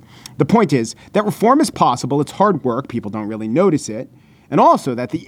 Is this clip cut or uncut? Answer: uncut